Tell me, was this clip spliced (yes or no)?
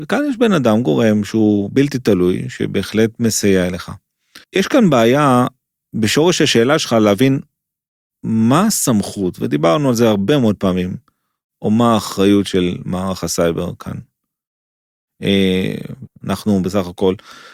yes